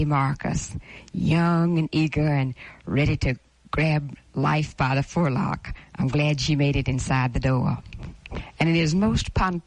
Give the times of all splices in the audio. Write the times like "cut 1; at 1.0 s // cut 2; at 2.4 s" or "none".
cut 1; at 8.1 s